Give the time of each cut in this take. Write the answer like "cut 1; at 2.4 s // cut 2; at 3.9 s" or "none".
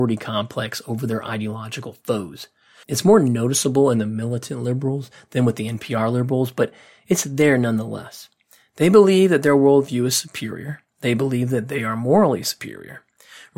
none